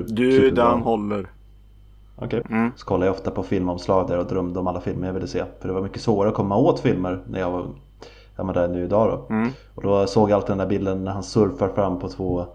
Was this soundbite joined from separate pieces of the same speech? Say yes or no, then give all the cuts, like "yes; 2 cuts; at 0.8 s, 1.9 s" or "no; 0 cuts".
yes; 1 cut; at 2.4 s